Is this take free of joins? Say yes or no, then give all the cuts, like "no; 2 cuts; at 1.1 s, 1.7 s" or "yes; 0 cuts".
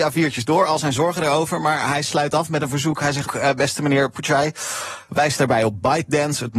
no; 2 cuts; at 3.3 s, 5.1 s